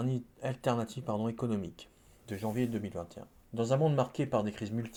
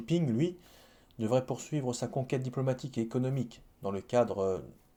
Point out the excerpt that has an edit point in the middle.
first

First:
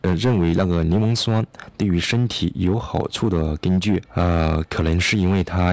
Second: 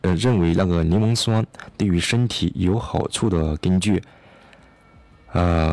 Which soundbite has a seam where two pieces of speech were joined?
first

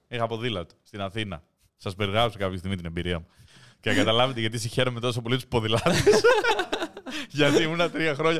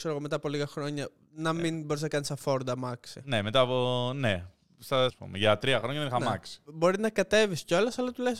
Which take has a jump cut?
second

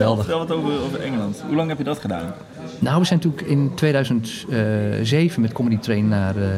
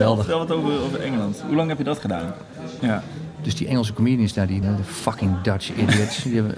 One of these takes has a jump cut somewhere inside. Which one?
second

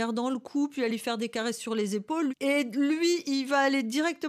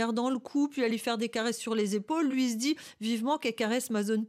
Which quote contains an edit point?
first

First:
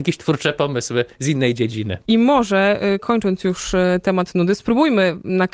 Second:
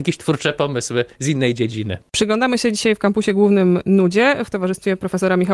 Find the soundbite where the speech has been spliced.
first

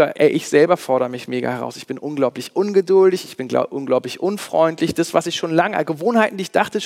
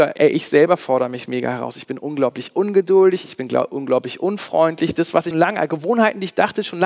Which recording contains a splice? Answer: second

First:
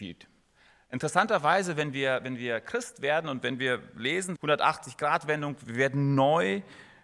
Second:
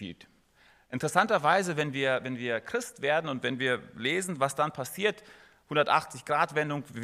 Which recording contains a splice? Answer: first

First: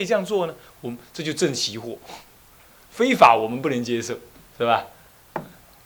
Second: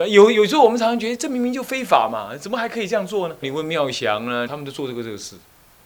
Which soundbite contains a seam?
second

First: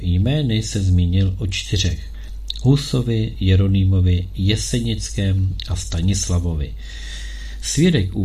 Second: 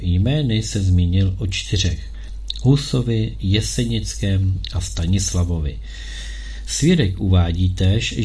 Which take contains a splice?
second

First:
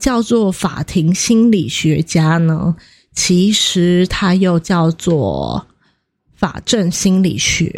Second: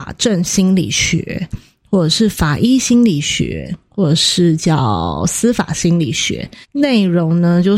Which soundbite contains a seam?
second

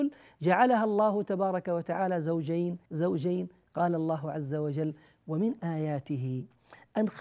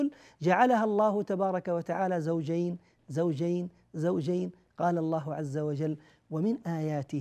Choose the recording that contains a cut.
first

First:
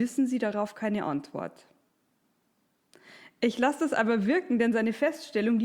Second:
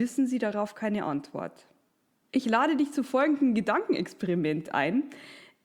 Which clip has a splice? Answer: second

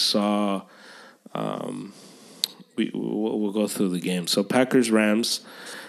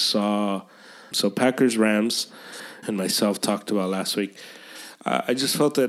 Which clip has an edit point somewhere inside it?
second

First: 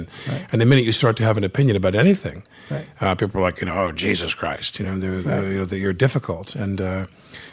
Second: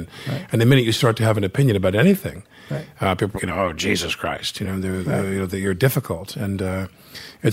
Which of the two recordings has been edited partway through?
second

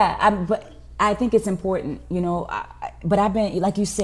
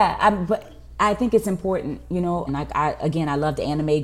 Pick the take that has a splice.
second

